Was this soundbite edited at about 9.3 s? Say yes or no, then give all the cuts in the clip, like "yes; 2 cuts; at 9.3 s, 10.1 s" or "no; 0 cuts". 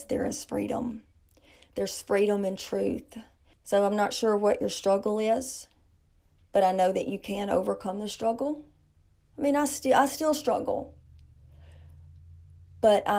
yes; 2 cuts; at 3.5 s, 9.3 s